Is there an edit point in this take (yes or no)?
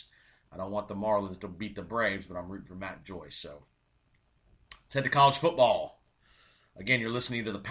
no